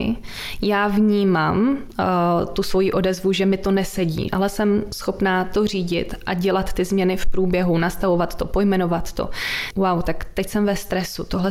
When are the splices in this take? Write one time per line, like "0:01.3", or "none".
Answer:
0:04.3
0:09.7